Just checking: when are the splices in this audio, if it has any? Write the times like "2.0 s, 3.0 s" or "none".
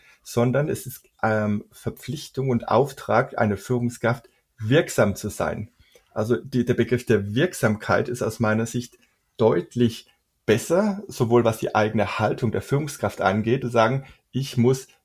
none